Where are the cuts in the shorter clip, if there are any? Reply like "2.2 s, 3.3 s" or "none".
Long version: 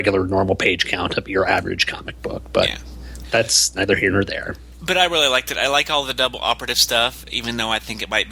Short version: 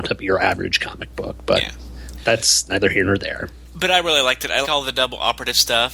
4.6 s